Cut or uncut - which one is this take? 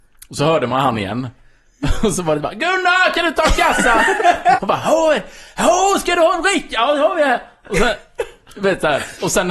cut